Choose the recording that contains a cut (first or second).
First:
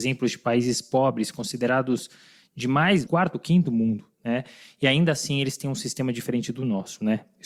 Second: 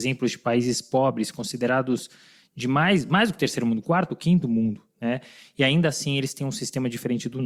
first